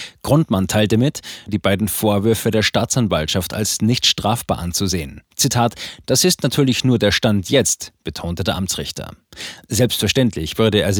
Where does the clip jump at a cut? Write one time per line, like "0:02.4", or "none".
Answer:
0:01.5